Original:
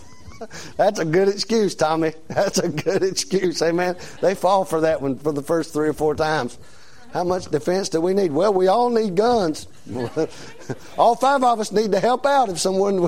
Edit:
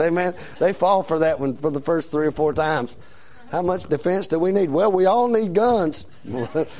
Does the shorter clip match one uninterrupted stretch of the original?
yes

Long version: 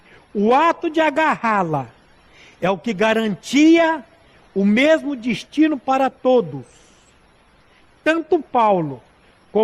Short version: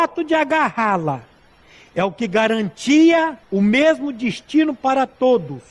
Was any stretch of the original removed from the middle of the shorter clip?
yes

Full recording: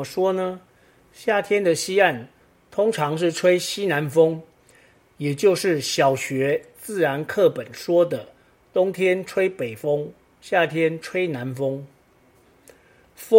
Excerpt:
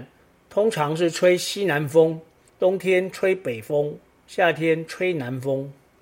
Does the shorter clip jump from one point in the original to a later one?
yes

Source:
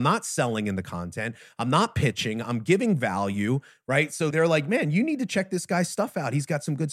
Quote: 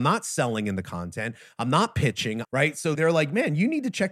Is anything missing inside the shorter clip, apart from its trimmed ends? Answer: yes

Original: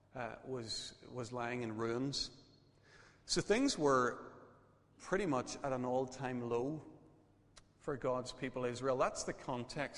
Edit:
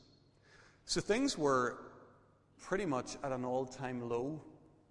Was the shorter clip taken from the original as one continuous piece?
yes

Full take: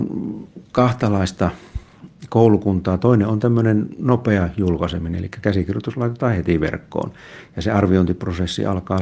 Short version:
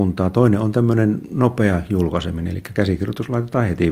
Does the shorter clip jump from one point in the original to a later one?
no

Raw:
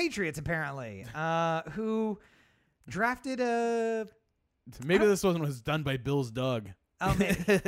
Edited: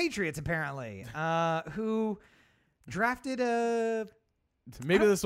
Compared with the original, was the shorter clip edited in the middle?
no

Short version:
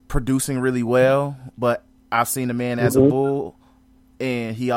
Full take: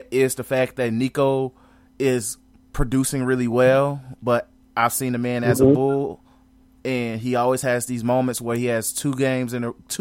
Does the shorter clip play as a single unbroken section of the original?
yes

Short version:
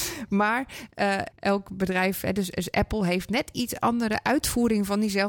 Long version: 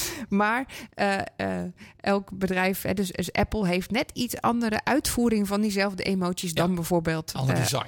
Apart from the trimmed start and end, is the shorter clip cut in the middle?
yes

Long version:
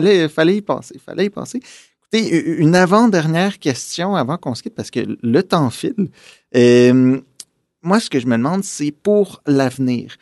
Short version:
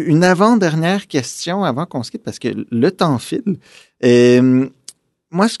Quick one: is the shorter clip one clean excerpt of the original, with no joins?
yes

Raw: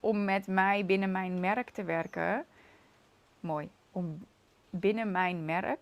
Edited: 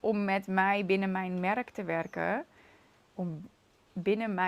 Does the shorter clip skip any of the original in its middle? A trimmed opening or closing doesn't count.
yes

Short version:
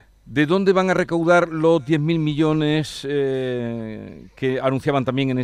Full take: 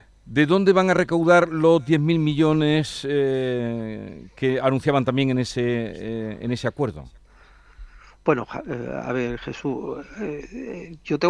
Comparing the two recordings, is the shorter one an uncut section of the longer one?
yes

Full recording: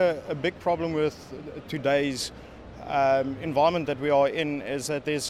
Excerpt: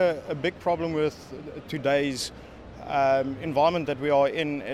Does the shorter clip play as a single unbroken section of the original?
yes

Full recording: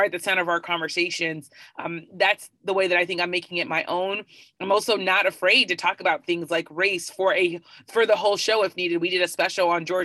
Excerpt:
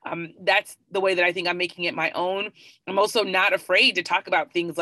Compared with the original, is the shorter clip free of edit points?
yes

